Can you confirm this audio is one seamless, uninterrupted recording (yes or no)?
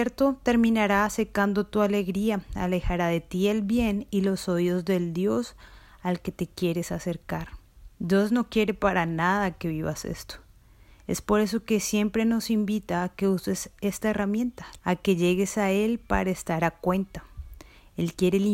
no